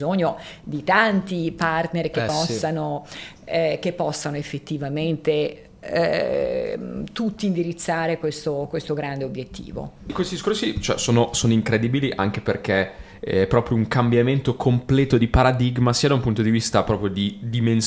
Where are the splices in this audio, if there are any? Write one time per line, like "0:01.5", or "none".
none